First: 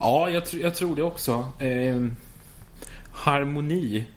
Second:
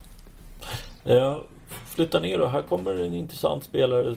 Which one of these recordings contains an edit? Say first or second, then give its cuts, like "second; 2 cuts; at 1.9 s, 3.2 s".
second; 1 cut; at 1.0 s